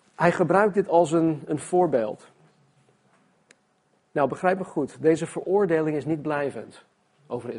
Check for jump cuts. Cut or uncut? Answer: uncut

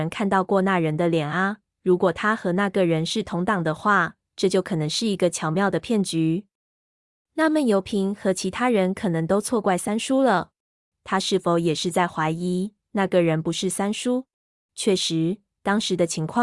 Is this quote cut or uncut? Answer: cut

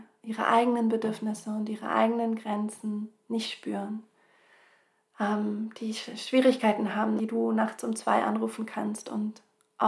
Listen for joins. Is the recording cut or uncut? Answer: cut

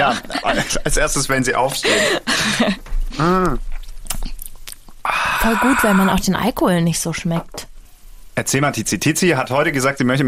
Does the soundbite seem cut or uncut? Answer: cut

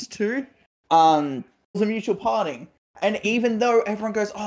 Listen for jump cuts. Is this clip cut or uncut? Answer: cut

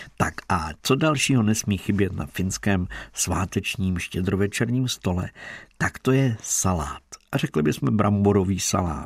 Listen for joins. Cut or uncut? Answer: uncut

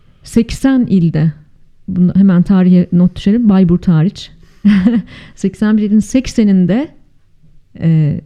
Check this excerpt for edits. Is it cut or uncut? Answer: uncut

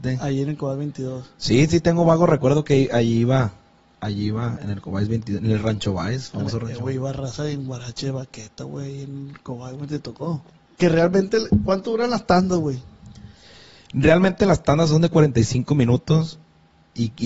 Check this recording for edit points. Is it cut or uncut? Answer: cut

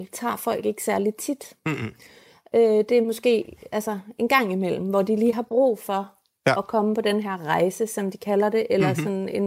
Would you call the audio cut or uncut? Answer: uncut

